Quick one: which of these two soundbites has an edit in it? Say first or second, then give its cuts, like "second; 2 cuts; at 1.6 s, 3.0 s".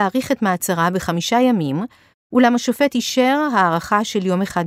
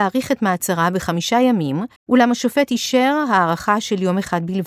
second; 1 cut; at 2.0 s